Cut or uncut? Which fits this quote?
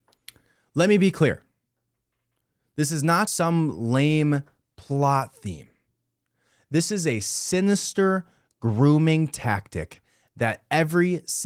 cut